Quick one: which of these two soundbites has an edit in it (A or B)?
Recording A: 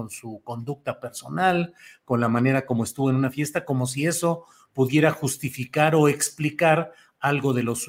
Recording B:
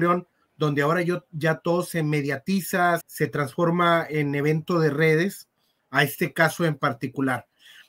B